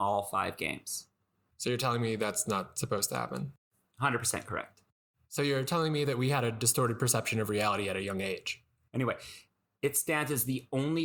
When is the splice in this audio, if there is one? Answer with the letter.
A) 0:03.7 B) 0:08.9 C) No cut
B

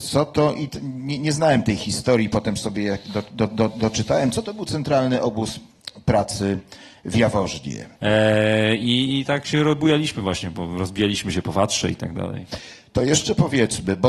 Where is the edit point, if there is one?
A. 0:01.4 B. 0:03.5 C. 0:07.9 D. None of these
C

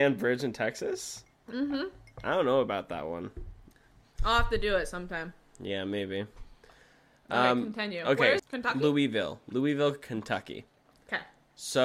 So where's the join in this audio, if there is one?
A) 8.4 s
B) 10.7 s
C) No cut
A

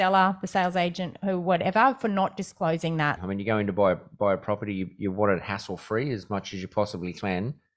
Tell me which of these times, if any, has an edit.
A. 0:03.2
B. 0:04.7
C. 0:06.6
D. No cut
A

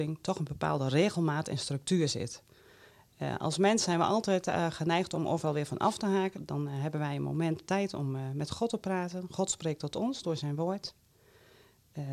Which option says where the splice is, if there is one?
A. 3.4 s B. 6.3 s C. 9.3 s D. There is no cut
B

